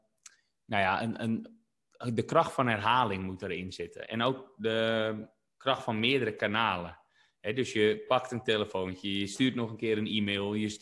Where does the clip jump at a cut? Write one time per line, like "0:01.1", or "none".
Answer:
none